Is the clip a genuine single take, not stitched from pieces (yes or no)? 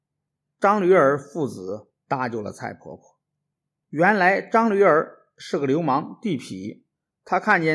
yes